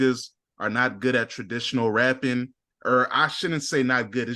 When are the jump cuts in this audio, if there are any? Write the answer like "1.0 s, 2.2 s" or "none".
none